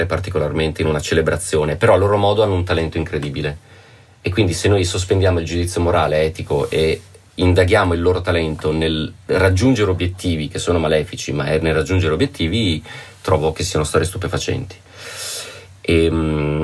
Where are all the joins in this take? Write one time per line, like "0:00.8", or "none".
none